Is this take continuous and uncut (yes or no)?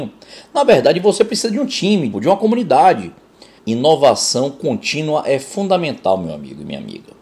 no